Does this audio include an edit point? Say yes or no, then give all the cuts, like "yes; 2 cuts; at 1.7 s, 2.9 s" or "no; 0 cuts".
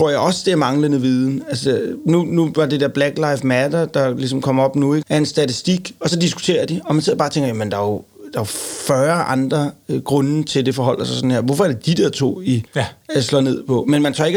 yes; 2 cuts; at 5.0 s, 12.7 s